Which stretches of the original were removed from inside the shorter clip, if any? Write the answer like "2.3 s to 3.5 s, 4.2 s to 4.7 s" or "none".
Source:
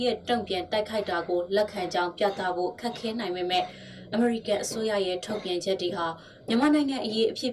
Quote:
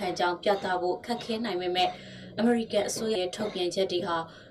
4.9 s to 5.0 s

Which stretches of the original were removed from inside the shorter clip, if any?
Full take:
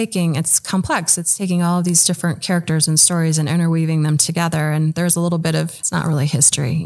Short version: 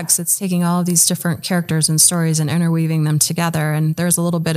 none

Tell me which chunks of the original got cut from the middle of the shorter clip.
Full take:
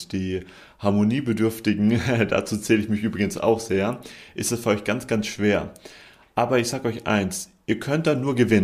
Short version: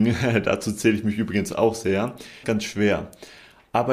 4.3 s to 5.1 s

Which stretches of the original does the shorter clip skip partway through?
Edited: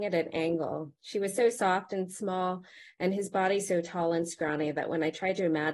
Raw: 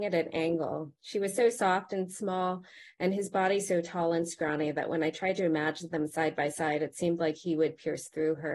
none

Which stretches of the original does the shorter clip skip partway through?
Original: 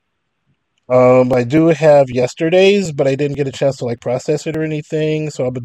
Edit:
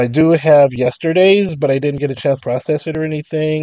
3.8 s to 4.0 s

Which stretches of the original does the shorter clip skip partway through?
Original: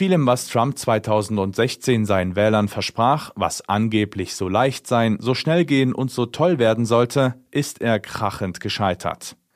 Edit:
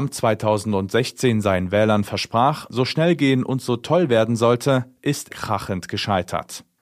3.3 s to 5.2 s, 7.8 s to 8.0 s

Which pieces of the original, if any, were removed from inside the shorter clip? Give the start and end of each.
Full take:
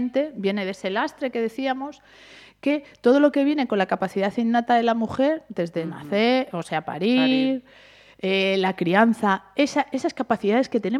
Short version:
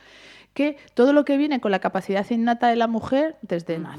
none

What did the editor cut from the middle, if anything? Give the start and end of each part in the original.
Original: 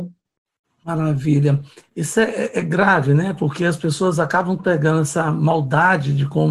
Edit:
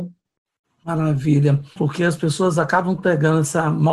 1.8 s to 3.4 s

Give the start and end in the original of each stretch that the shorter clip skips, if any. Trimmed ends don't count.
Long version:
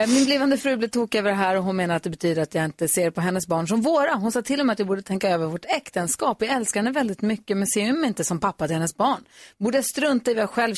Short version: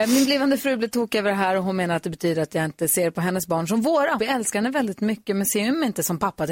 4.2 s to 6.4 s

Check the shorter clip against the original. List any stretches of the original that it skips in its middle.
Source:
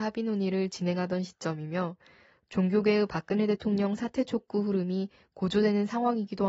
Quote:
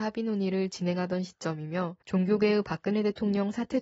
2.0 s to 2.4 s

